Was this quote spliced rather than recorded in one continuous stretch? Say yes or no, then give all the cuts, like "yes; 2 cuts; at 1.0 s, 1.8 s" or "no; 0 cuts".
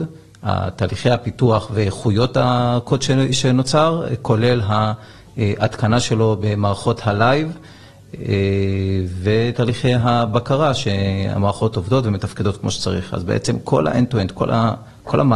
no; 0 cuts